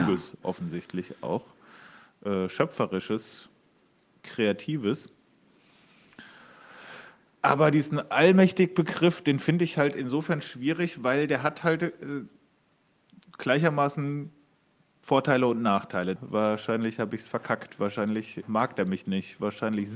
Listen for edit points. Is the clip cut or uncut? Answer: cut